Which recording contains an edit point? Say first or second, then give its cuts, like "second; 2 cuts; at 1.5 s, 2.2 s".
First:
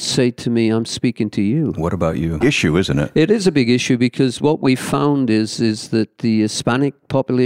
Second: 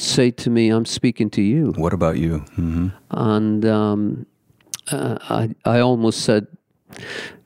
first; 1 cut; at 2.4 s